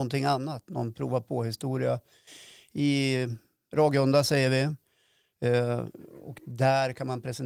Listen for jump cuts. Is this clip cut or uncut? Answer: uncut